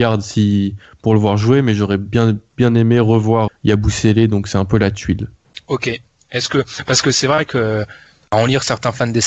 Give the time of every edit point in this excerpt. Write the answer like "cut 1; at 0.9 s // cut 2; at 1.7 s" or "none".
cut 1; at 3.5 s